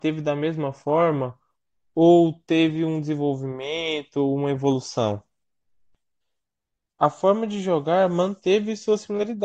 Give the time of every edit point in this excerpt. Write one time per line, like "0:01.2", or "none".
none

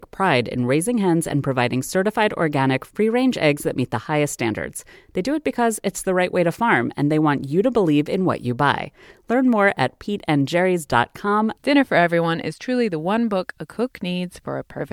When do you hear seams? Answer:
0:11.5

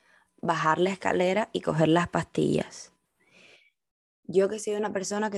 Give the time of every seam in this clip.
none

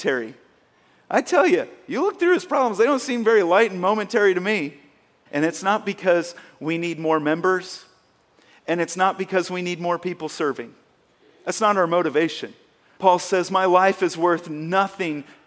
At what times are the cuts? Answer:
0:05.3
0:13.0

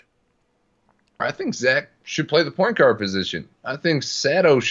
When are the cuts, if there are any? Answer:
0:01.2

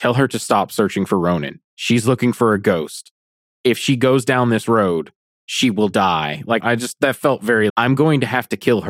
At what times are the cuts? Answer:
0:06.6
0:07.7

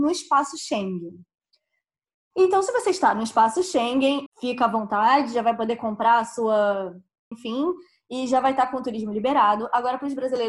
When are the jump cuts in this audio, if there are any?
0:04.3
0:07.3

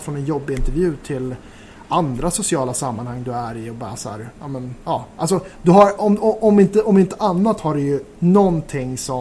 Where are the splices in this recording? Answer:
none

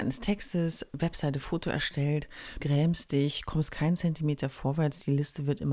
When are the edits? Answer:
0:02.6

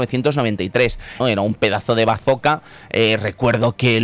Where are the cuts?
0:01.2

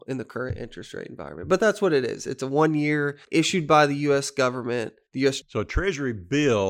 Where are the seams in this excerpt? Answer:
0:05.4

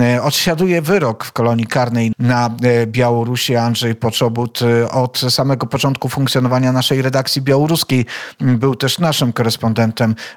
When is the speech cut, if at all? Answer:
0:02.1

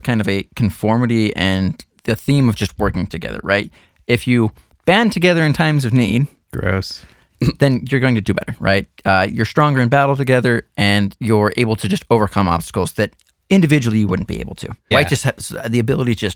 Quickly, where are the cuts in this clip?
0:08.2
0:14.9

